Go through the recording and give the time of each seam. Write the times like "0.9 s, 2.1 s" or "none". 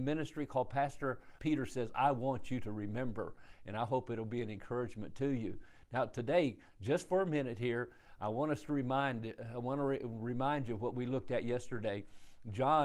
1.4 s